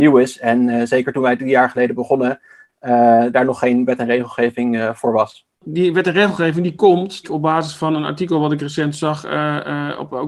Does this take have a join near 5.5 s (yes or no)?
yes